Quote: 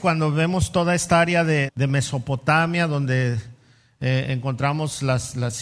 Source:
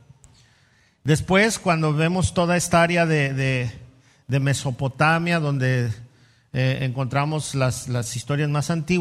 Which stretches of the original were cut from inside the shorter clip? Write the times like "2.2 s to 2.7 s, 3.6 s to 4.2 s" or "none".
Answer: 3.3 s to 4.2 s